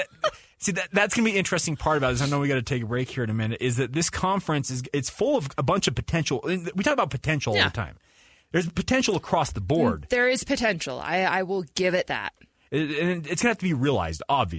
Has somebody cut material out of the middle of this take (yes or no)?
no